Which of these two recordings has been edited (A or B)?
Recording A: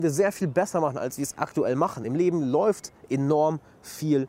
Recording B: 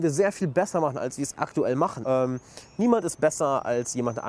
B